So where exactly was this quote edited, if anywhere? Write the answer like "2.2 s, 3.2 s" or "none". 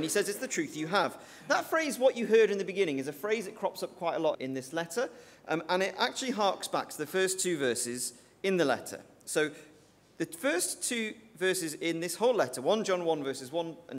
4.3 s

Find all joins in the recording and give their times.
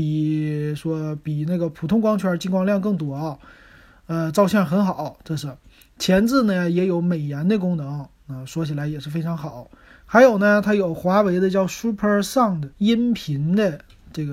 10.0 s, 12.7 s

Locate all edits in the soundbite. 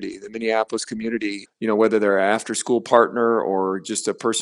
1.5 s

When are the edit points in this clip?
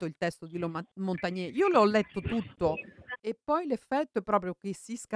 3.1 s

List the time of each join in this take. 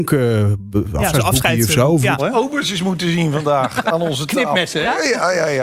2.2 s, 3.8 s

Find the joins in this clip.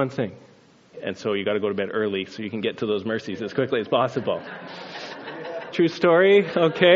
0.9 s, 5.7 s

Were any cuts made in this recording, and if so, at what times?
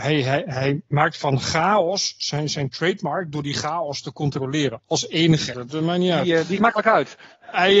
5.5 s, 6.6 s

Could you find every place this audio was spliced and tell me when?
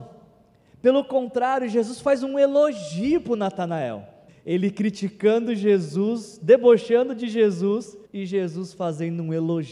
4.3 s, 8.0 s

